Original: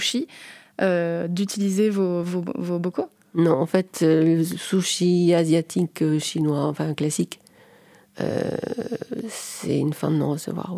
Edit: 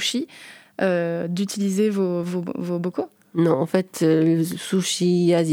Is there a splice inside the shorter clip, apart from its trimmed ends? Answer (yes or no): no